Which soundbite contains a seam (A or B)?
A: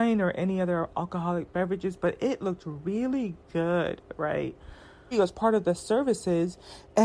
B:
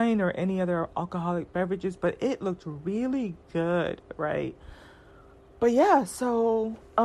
A